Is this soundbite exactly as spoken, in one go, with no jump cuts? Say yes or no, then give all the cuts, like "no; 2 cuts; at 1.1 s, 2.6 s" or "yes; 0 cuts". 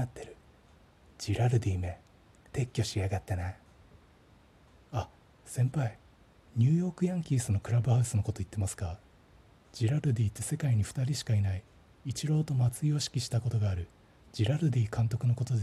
yes; 0 cuts